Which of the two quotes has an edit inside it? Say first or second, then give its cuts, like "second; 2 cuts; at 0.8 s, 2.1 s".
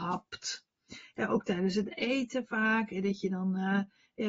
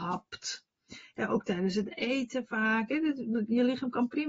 second; 1 cut; at 2.9 s